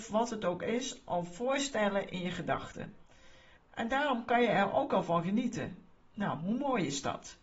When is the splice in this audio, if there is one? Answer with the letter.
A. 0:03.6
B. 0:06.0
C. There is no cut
A